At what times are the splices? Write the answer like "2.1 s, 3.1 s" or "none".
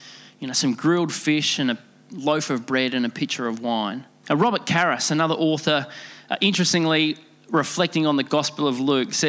4.2 s